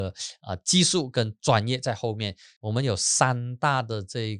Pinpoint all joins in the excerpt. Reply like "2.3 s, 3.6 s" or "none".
2.6 s